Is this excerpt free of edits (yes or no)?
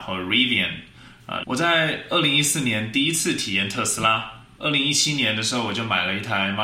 no